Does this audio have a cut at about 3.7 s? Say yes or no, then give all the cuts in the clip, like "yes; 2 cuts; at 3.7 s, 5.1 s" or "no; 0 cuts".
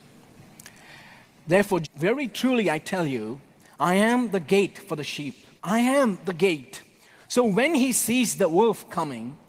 no; 3 cuts; at 1.8 s, 5.6 s, 7.2 s